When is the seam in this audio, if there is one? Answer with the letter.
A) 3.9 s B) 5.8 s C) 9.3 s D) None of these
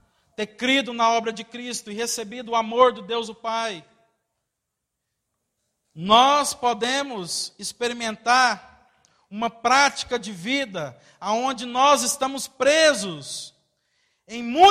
D